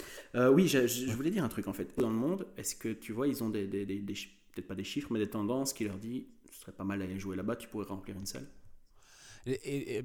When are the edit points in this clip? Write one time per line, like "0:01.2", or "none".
0:02.0